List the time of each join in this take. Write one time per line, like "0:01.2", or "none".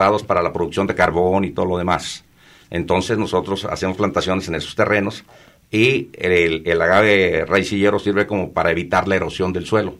none